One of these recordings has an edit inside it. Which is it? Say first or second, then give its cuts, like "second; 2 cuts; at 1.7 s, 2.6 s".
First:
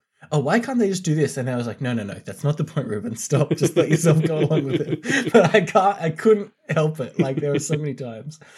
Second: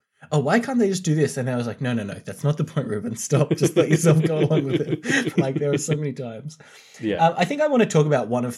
second; 1 cut; at 5.3 s